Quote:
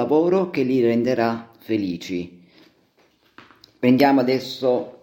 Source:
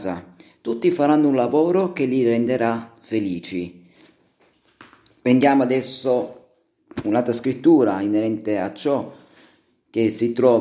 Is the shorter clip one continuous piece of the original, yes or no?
yes